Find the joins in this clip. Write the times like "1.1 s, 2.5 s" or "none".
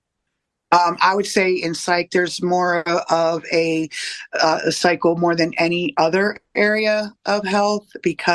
none